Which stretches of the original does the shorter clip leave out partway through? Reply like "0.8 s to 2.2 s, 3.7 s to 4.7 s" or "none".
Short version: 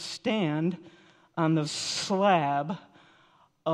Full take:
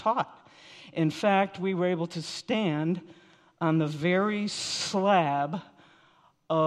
3.9 s to 4.5 s